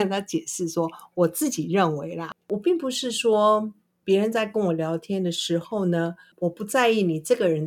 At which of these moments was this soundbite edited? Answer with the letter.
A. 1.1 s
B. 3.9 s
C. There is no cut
C